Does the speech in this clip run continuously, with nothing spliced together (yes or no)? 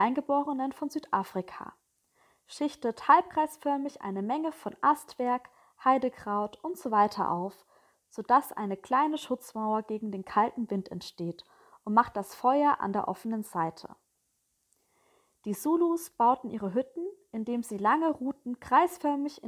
yes